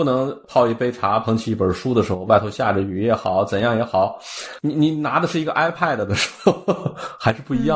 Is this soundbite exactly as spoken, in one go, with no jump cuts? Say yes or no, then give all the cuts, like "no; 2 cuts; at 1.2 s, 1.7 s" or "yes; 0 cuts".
yes; 0 cuts